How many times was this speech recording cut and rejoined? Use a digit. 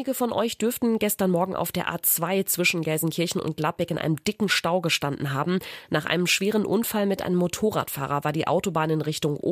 0